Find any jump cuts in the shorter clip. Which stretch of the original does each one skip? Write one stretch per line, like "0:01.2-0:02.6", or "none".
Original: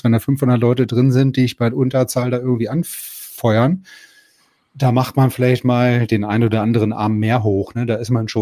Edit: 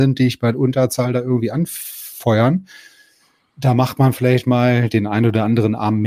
none